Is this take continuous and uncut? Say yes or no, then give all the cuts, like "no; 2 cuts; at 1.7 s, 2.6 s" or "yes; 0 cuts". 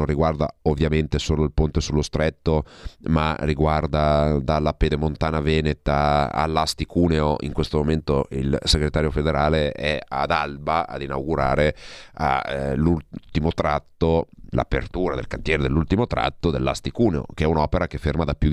no; 1 cut; at 14.5 s